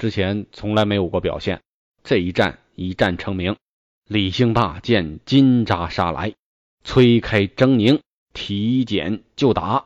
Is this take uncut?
no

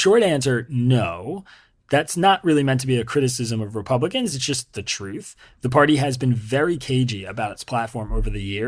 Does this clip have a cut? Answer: no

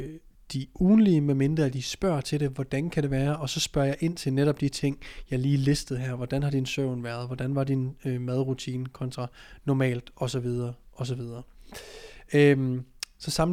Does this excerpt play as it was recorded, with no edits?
yes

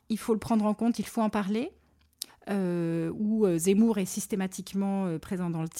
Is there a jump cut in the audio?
yes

